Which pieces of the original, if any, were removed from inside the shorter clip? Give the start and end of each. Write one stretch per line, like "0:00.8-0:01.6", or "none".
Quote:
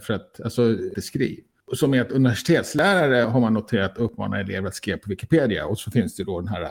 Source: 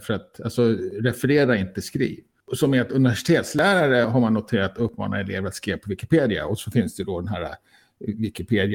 0:00.9-0:01.7

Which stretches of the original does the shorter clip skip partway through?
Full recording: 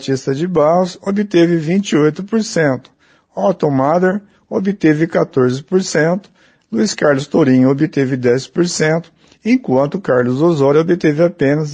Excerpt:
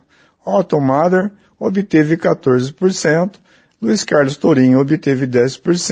none

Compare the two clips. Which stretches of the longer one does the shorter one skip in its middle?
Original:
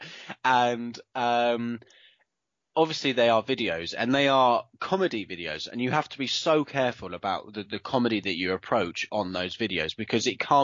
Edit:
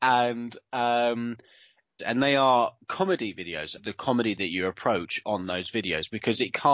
0:02.4-0:03.9
0:05.7-0:07.6

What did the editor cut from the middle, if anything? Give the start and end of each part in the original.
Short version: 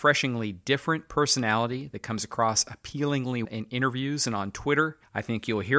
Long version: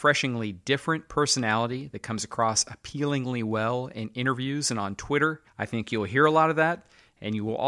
0:03.4-0:03.9

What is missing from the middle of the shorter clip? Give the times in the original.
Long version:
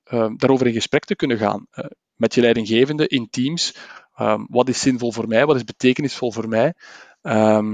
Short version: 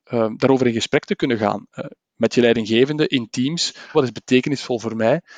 0:03.9-0:05.5

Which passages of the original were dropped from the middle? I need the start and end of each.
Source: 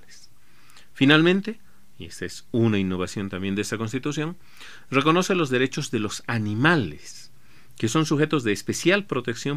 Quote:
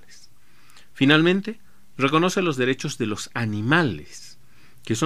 0:02.0-0:04.9

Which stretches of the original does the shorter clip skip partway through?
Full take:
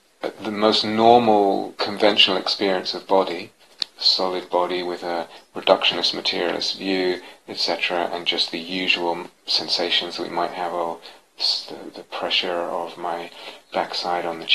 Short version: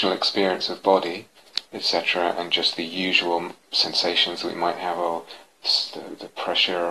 0:03.9-0:07.4

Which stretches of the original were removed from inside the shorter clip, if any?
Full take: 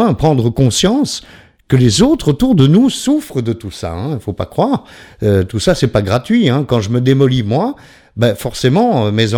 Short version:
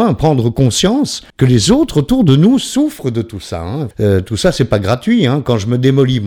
0:01.3-0:01.6
0:04.2-0:05.1

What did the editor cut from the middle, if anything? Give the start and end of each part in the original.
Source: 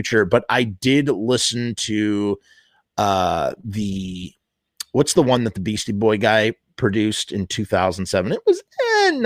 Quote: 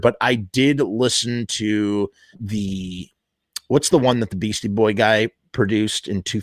0:02.6-0:03.6

